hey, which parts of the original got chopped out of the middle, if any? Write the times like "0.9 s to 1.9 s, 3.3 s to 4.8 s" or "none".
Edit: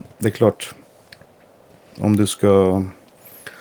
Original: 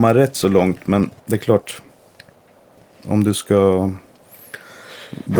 none